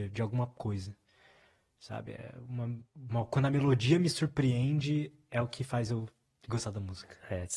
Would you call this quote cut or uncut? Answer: uncut